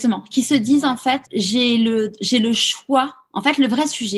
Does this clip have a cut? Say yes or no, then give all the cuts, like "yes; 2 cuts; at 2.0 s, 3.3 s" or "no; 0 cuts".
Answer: yes; 1 cut; at 1.2 s